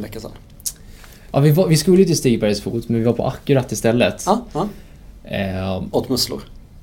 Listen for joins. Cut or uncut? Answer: uncut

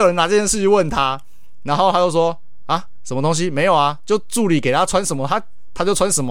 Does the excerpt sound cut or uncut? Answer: uncut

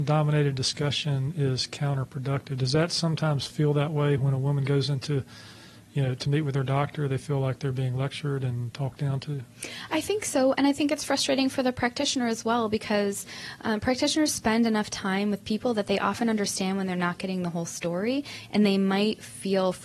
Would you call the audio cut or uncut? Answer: uncut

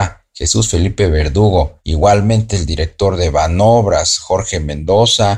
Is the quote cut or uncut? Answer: cut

